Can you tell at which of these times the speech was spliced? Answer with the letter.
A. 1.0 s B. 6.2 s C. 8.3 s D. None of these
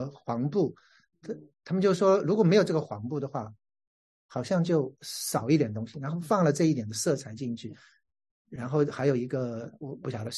B